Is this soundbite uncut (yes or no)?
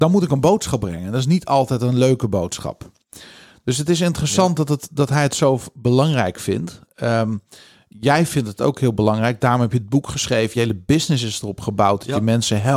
yes